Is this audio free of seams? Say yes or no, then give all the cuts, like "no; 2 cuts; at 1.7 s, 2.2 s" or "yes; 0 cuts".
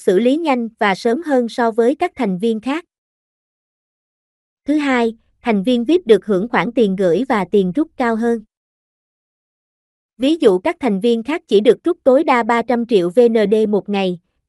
yes; 0 cuts